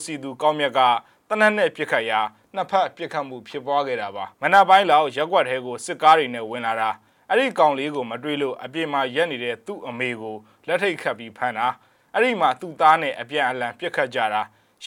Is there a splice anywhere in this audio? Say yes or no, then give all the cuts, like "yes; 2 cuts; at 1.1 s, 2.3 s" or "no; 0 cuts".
yes; 1 cut; at 4.3 s